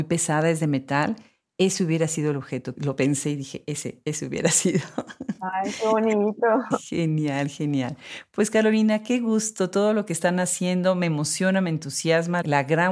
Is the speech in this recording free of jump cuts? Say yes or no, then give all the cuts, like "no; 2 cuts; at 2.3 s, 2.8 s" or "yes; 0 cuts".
yes; 0 cuts